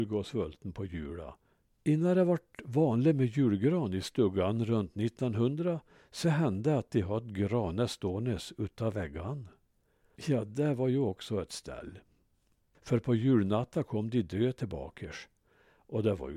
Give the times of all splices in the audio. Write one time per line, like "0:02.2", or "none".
0:01.7
0:10.2
0:12.7